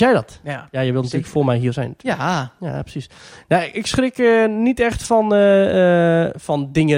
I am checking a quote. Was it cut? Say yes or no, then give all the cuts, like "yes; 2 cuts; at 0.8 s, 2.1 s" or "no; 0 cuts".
no; 0 cuts